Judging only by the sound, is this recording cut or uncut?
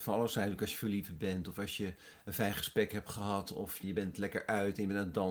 cut